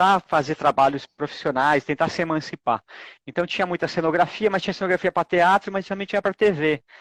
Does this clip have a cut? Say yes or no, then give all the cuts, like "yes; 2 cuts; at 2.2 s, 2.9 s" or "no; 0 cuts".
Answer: no; 0 cuts